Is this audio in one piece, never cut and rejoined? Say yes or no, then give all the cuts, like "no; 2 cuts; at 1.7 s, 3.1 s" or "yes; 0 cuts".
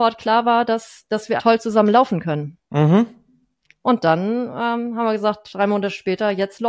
no; 1 cut; at 1.4 s